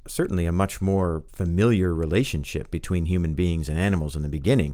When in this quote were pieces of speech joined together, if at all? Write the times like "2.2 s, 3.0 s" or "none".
none

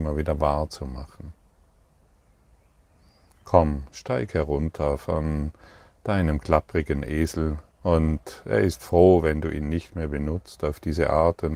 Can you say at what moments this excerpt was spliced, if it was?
7.7 s

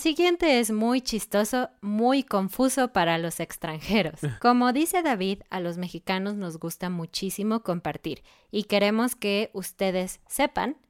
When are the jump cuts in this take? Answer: 4.4 s

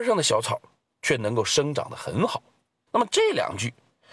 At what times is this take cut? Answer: 2.9 s

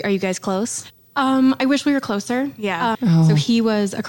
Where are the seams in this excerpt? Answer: 2.9 s

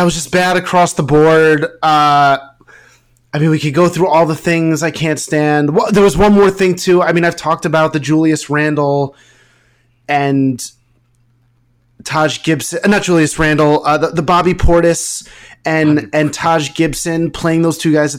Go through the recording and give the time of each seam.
none

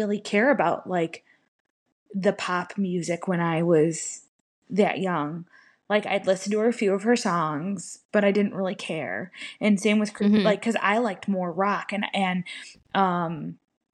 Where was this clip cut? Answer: none

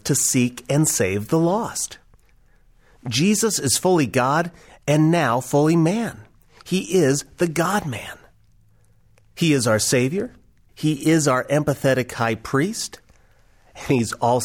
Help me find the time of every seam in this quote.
10.7 s

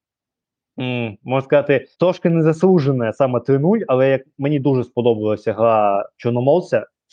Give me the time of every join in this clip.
1.9 s

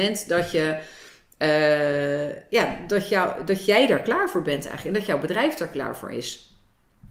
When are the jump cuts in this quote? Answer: none

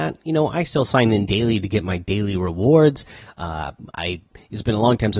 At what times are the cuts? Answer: none

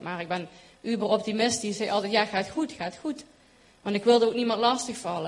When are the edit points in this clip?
none

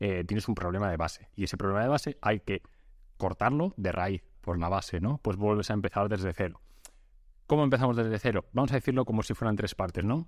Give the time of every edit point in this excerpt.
4.3 s, 8.5 s

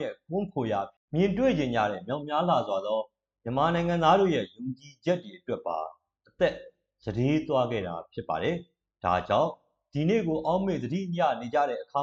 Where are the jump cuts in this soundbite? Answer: none

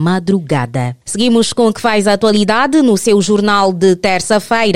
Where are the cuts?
1.0 s

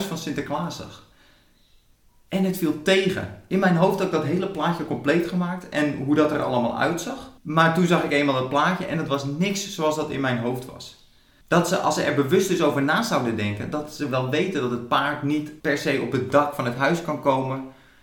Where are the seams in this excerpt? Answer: 7.4 s, 11.4 s, 15.6 s

